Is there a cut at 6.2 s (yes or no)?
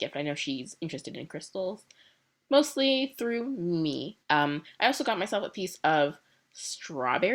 no